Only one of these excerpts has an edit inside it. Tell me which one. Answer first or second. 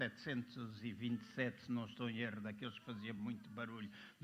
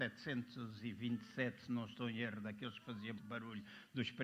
second